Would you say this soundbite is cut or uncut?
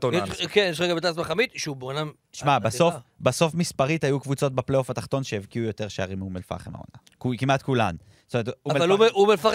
uncut